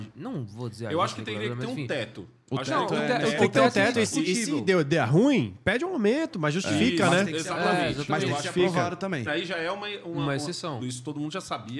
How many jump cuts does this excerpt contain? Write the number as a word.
three